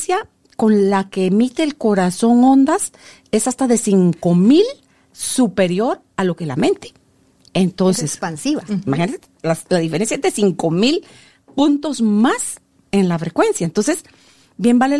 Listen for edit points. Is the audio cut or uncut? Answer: cut